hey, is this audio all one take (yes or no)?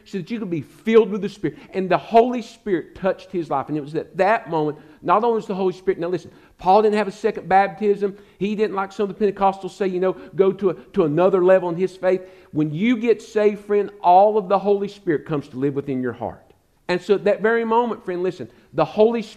no